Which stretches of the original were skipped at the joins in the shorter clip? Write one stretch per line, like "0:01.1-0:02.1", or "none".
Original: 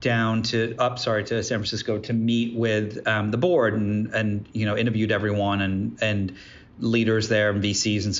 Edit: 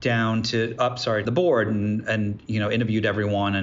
0:01.3-0:03.3